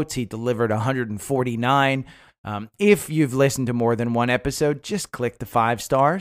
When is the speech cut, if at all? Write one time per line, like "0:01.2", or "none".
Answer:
0:02.3